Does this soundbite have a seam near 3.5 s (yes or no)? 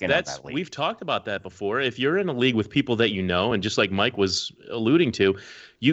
no